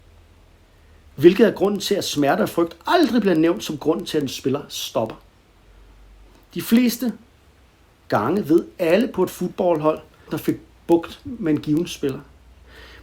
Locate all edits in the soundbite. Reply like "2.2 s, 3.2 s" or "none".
10.3 s